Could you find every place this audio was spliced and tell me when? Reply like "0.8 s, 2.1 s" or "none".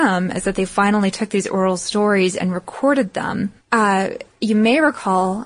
3.6 s